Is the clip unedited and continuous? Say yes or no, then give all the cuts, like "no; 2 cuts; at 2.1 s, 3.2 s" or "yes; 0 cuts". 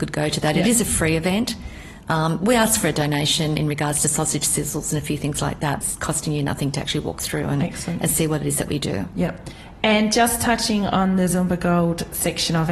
no; 1 cut; at 5.8 s